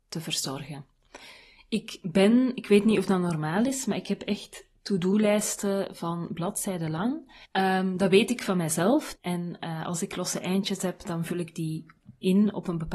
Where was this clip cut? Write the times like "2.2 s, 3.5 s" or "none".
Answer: 7.4 s, 9.1 s